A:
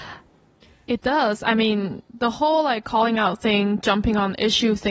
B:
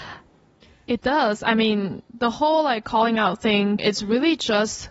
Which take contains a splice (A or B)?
B